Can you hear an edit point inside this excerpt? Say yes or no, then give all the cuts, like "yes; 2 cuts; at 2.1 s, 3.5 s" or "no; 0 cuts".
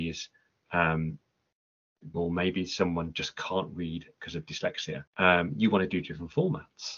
yes; 2 cuts; at 2.1 s, 5.1 s